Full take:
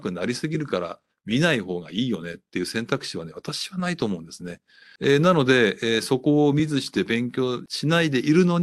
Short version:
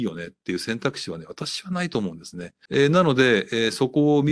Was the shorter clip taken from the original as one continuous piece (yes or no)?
no